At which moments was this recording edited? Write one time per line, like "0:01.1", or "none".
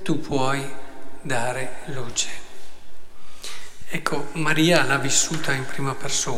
none